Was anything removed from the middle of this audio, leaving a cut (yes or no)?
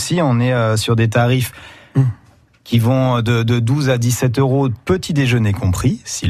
no